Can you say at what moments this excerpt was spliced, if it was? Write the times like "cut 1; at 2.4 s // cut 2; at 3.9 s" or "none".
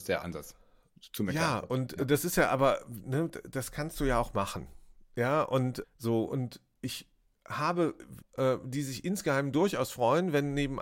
cut 1; at 5.8 s // cut 2; at 8.2 s

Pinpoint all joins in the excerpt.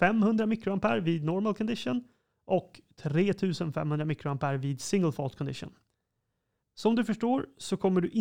cut 1; at 6.6 s

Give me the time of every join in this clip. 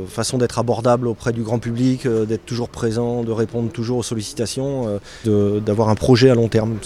cut 1; at 5.2 s

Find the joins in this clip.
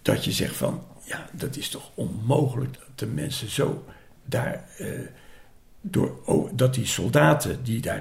cut 1; at 2.7 s

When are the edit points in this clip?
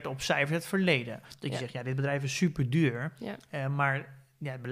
cut 1; at 1.2 s

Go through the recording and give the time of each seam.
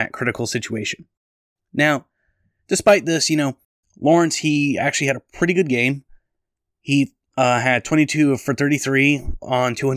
none

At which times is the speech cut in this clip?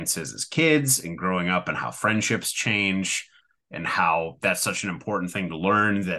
none

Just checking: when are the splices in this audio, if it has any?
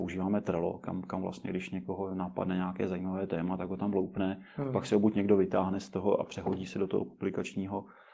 none

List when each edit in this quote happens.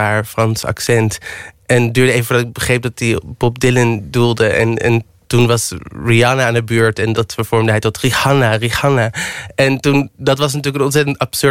cut 1; at 7.1 s

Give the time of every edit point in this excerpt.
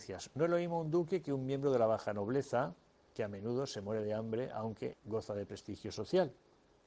cut 1; at 4.9 s

